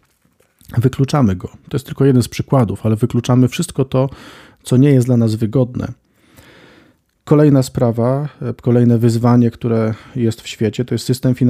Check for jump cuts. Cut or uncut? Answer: uncut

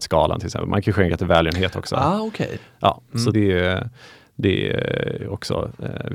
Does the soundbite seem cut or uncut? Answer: cut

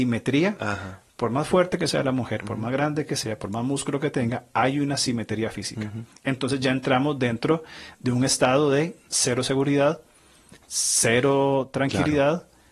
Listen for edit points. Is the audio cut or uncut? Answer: uncut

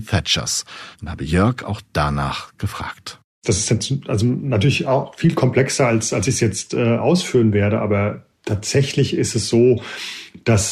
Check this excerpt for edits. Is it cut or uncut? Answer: cut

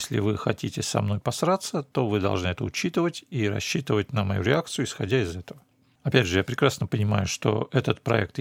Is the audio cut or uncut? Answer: uncut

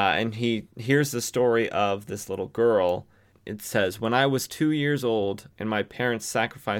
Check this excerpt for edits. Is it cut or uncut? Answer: cut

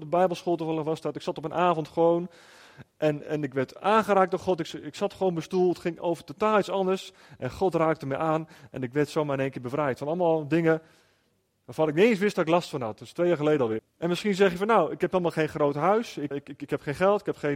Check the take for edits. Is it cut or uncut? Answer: cut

